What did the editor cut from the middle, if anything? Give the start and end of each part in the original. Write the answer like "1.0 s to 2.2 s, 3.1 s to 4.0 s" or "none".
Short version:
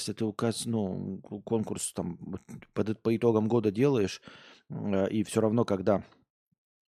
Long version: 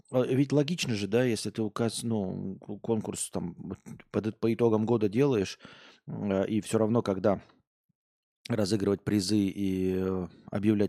none